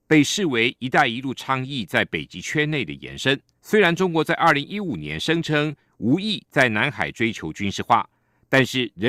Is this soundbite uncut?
no; 1 cut; at 3.6 s

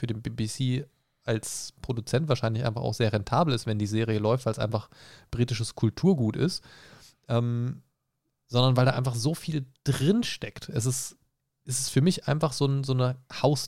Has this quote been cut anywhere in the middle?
no; 0 cuts

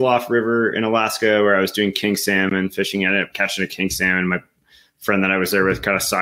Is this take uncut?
yes; 0 cuts

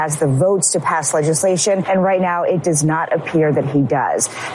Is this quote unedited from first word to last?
yes; 0 cuts

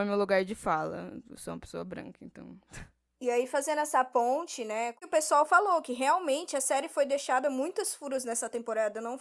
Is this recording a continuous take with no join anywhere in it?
yes; 0 cuts

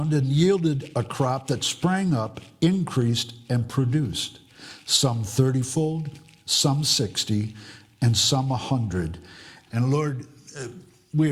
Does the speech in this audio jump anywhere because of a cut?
yes; 1 cut; at 9.7 s

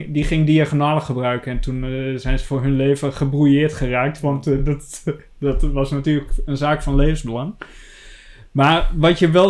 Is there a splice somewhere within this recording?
no; 0 cuts

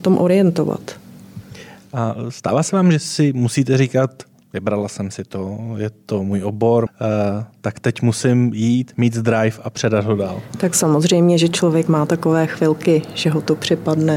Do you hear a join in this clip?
yes; 1 cut; at 6.9 s

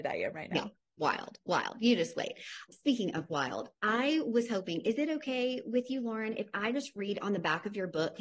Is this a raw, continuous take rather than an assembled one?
yes; 0 cuts

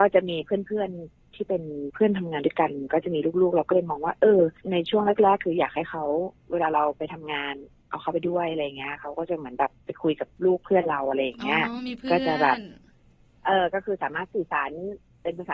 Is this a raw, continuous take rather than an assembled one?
no; 1 cut; at 4.6 s

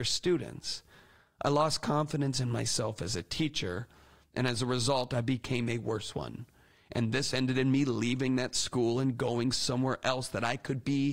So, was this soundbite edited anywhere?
no; 0 cuts

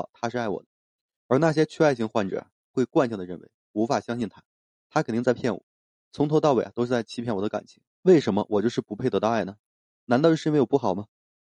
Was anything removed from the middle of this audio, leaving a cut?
yes; 1 cut; at 7.9 s

